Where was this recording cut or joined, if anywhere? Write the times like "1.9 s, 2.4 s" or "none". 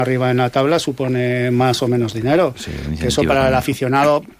none